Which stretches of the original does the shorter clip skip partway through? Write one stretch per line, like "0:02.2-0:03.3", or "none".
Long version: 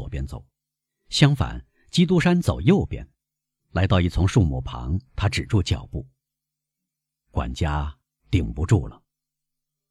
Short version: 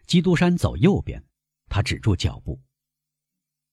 0:03.5-0:05.1